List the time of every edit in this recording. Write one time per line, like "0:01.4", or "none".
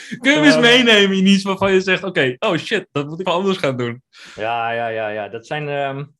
0:03.2